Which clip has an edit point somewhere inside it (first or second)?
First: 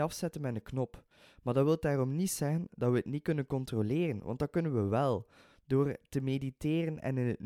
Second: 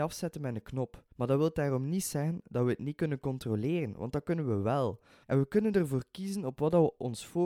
second